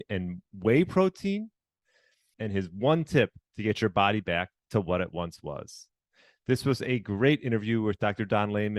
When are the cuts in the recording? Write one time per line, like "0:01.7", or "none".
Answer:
0:02.3